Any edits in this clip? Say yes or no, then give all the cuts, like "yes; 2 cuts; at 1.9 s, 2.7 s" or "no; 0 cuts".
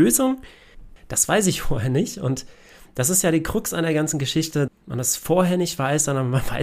yes; 2 cuts; at 1.0 s, 4.7 s